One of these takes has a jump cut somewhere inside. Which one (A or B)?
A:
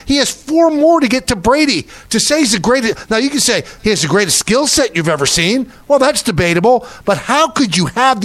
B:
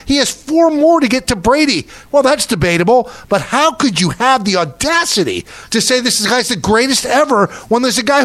B